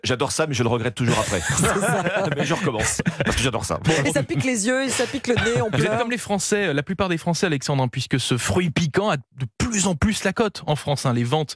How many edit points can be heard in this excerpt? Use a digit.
0